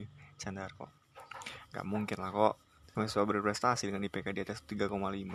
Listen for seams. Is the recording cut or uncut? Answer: cut